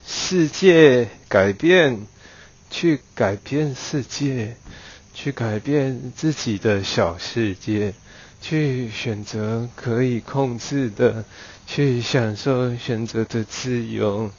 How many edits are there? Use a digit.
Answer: 2